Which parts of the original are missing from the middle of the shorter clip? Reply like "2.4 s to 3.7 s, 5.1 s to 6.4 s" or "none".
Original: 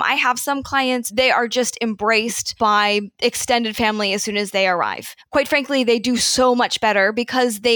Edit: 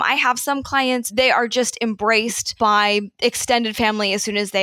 none

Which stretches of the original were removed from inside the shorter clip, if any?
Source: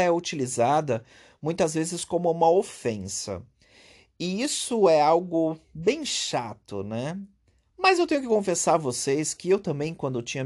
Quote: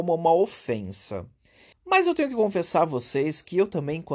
3.9 s to 7.6 s

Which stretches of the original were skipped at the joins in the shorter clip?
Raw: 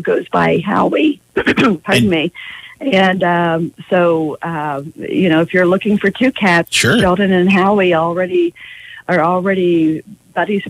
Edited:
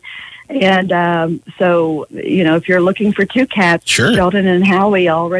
4.4 s to 4.9 s

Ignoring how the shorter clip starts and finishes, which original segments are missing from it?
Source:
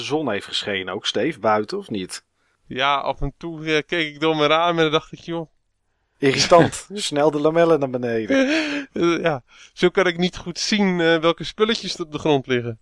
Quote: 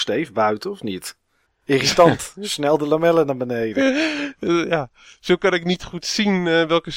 2.5 s to 6.0 s

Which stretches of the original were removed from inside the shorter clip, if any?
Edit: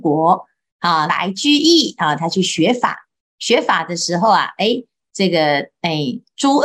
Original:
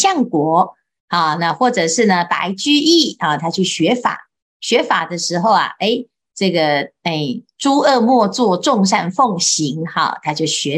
1.4 s to 2.3 s

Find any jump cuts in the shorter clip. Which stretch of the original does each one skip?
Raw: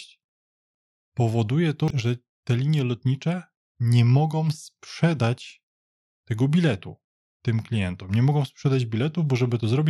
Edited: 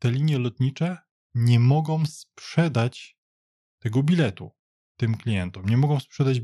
none

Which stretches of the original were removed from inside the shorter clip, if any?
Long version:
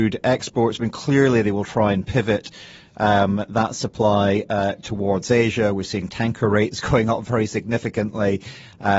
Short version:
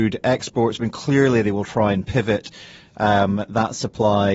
none

